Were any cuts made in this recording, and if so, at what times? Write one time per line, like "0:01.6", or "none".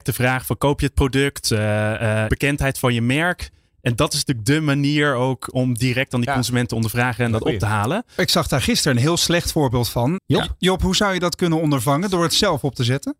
0:02.3
0:10.2